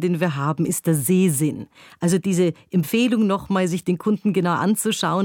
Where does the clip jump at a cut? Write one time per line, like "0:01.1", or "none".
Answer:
none